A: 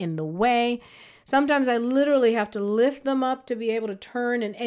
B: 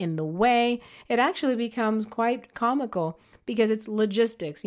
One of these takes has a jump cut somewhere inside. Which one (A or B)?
B